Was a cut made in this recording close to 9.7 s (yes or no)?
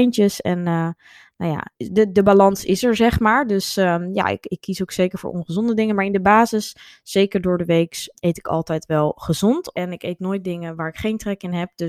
yes